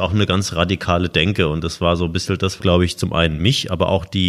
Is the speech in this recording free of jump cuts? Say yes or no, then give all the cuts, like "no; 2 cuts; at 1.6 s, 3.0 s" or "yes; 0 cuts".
no; 1 cut; at 2.6 s